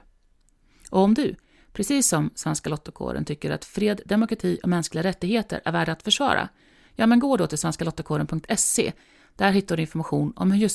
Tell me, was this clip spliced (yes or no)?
no